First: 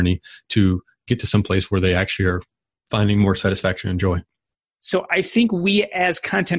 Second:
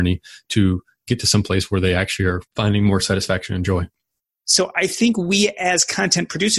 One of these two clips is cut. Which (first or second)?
second